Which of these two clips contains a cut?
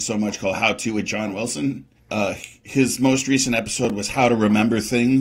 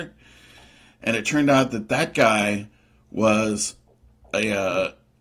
first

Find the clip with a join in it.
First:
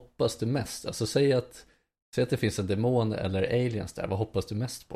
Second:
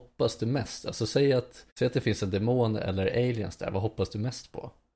second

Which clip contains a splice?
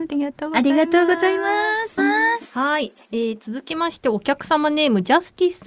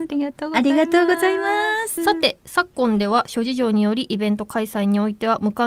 first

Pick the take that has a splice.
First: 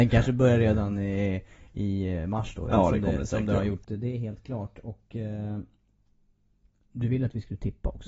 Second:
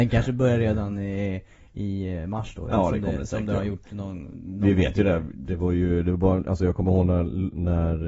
first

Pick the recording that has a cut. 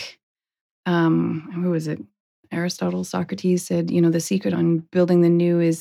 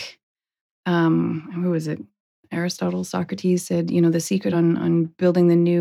first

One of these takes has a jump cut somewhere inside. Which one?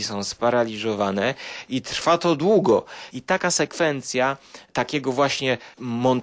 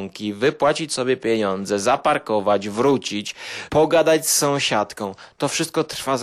first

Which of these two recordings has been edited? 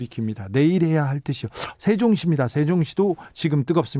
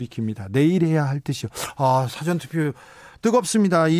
first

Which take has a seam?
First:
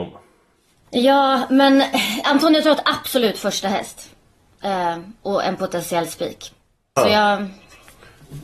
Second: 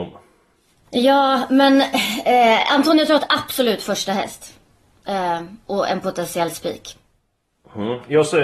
first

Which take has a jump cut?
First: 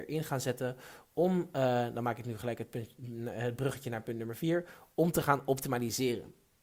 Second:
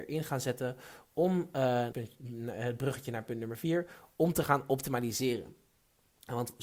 second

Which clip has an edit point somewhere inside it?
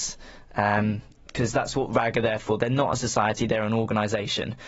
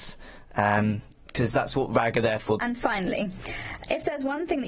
second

